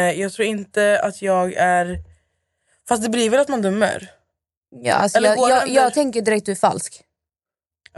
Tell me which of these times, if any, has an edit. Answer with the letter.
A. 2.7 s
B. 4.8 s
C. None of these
C